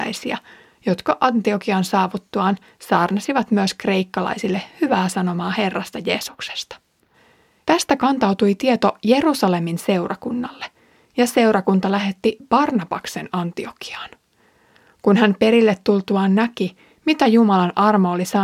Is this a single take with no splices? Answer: no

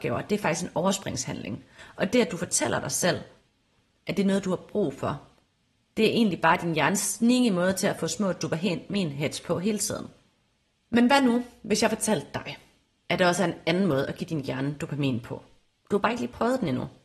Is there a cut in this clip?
no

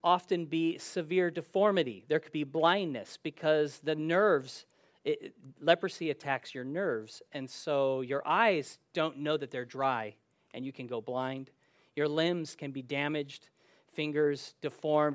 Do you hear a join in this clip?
no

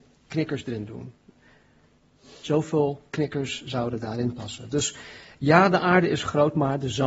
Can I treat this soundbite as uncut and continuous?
yes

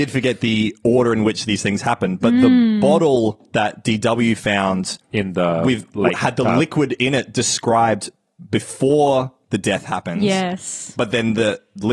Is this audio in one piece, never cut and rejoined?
yes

